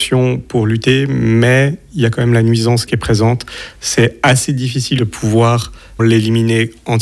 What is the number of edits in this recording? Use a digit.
2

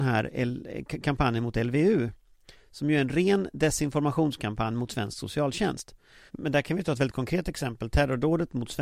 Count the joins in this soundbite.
1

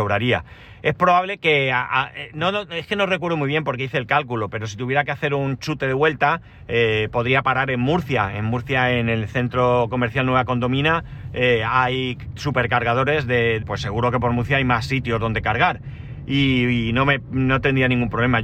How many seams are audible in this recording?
1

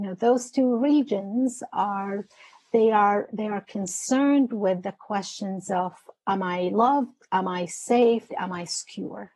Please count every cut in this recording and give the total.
1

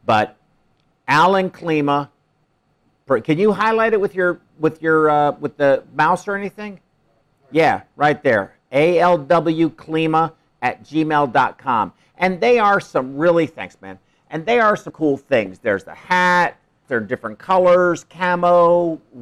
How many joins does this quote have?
2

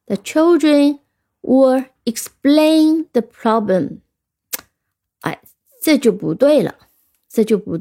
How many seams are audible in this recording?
0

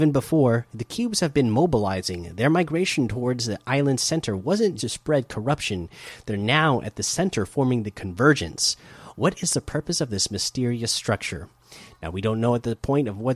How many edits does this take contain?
1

